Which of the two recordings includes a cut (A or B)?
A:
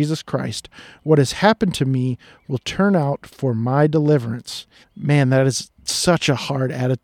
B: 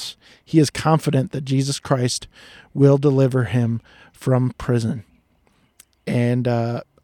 A